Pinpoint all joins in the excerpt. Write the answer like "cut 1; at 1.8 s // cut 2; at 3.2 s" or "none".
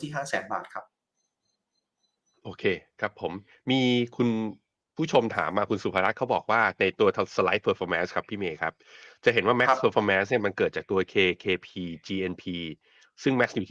none